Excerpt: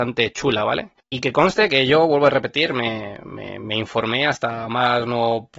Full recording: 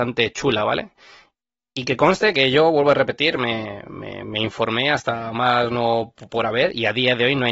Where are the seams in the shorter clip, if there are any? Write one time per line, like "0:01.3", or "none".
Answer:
0:01.0